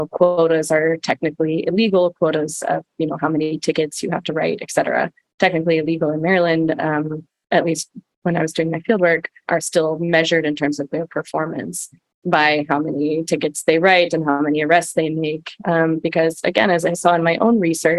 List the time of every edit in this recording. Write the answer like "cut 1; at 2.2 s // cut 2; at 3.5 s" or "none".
cut 1; at 9.5 s // cut 2; at 15.6 s